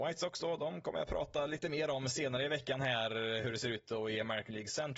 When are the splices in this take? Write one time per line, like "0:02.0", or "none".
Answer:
none